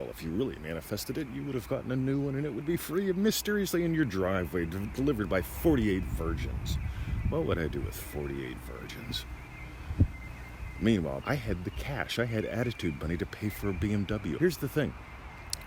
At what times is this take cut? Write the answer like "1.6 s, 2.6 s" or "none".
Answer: 11.2 s, 14.4 s